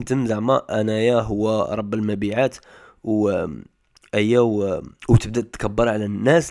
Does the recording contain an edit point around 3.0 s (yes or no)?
no